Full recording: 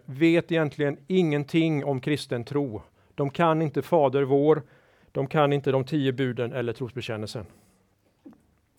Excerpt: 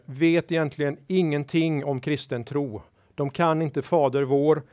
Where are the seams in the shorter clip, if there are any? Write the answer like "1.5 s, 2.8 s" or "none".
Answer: none